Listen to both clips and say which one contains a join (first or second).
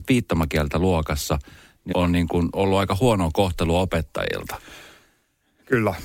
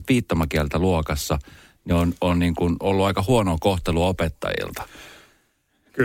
first